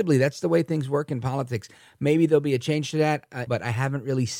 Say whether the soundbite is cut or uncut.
cut